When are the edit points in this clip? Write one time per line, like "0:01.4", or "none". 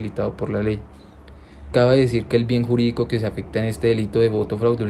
0:01.7